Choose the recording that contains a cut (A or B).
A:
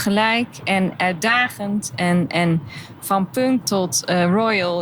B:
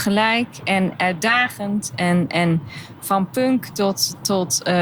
A